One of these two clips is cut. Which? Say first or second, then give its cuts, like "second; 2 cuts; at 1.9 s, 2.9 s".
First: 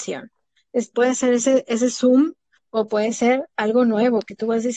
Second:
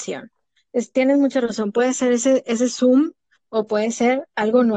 first; 1 cut; at 0.9 s